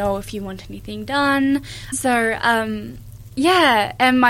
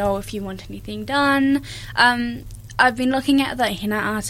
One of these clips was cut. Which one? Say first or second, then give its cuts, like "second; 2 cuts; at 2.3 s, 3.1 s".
first; 1 cut; at 1.9 s